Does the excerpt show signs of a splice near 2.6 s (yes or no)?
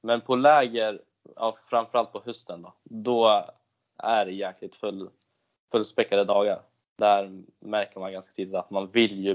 no